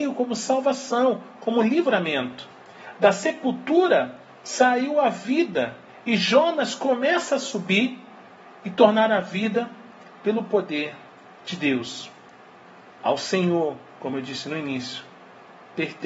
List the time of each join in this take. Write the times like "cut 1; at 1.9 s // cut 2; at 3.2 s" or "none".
none